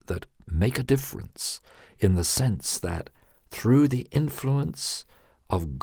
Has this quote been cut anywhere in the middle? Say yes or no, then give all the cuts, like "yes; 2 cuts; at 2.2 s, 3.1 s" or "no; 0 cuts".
no; 0 cuts